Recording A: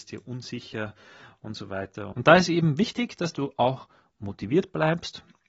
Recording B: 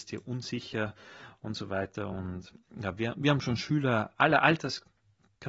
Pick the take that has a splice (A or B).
A